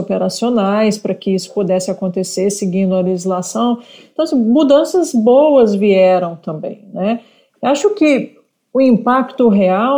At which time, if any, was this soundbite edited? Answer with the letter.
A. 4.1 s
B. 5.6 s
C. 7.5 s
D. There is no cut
D